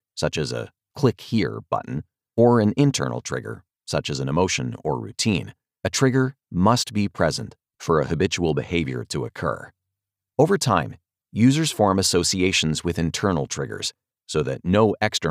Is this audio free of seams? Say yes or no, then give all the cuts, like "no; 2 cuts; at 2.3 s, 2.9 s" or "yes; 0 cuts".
yes; 0 cuts